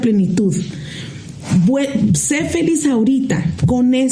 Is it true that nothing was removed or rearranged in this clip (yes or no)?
yes